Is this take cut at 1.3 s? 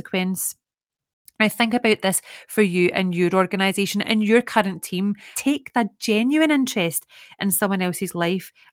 no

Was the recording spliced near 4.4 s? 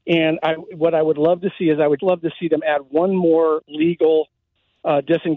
no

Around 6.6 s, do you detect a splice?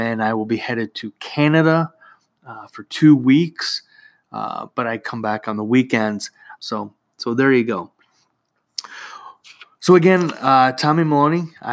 yes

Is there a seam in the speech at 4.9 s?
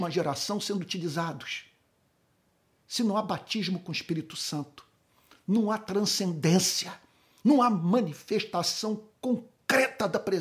no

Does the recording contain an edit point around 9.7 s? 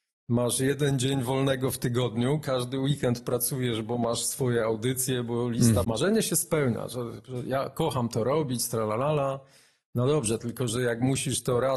no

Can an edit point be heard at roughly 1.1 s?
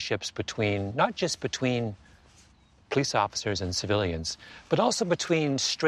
no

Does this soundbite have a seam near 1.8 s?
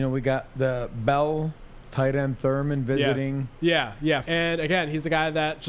no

